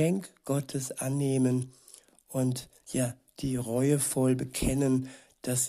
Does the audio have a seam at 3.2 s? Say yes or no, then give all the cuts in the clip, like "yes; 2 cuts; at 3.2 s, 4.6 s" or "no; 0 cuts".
no; 0 cuts